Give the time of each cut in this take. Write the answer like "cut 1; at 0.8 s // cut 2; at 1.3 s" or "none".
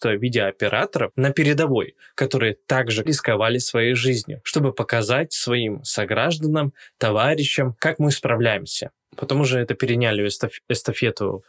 cut 1; at 3.1 s